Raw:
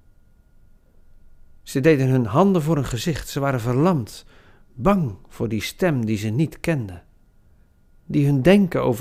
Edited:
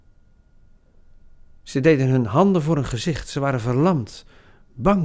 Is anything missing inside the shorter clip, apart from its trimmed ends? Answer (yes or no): no